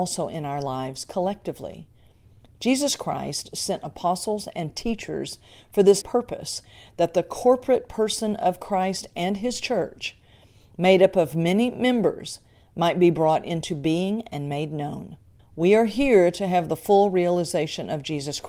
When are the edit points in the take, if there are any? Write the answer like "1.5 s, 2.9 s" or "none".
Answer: 6.0 s, 15.4 s

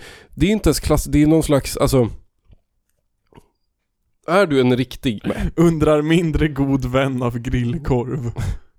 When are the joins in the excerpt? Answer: 5.2 s

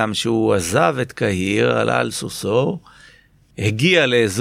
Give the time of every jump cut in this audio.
none

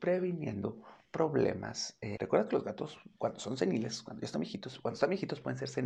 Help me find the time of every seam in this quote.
2.2 s

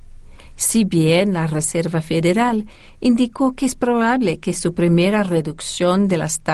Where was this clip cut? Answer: none

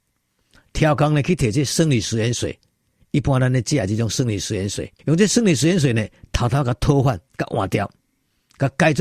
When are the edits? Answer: 5.0 s, 7.3 s

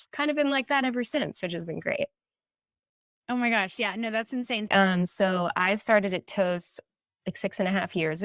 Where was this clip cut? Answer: 4.7 s

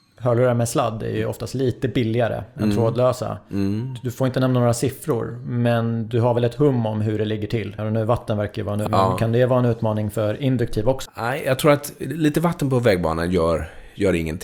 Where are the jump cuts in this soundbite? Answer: 7.8 s, 8.9 s, 11.1 s

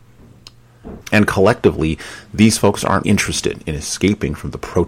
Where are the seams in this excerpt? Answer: 1.0 s, 3.0 s

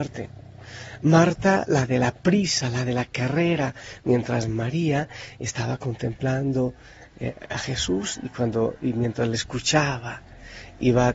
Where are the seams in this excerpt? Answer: none

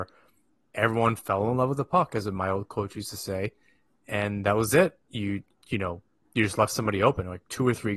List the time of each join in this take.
none

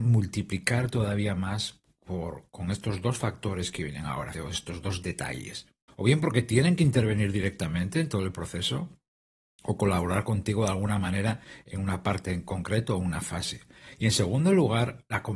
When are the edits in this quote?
4.3 s, 5.9 s

